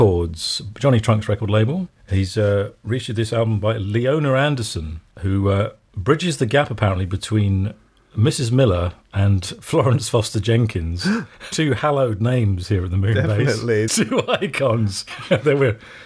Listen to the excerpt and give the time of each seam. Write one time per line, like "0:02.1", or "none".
0:11.5
0:13.9
0:15.1